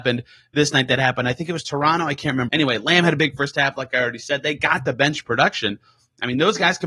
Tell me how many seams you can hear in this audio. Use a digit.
1